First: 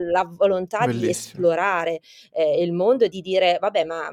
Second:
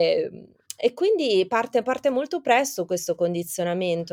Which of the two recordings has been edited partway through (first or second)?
first